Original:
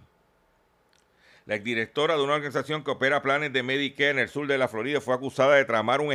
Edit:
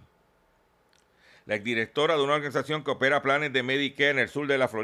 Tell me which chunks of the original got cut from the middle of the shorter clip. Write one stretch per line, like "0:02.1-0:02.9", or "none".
none